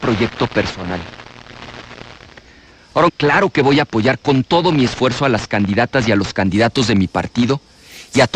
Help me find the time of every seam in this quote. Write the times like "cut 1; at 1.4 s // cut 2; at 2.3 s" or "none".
cut 1; at 3.1 s